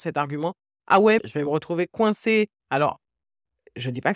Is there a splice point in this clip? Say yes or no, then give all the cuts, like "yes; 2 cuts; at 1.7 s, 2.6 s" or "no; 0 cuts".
yes; 2 cuts; at 1.2 s, 2.6 s